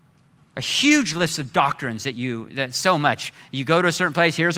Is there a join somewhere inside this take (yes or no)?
no